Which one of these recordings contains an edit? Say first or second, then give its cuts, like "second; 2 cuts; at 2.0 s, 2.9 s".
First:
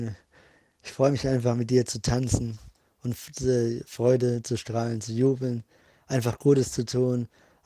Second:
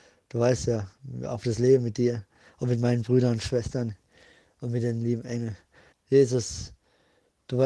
second; 1 cut; at 5.9 s